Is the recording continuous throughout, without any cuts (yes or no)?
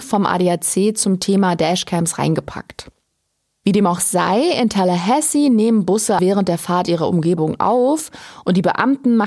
no